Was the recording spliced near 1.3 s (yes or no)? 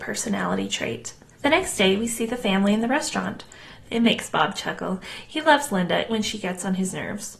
no